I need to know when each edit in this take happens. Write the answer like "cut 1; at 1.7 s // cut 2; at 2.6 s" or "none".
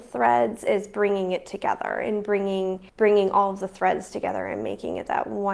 cut 1; at 2.9 s